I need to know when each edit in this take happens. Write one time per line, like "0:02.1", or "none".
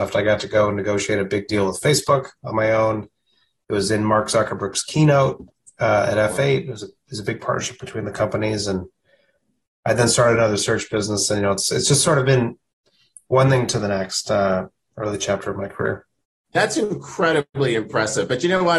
0:14.9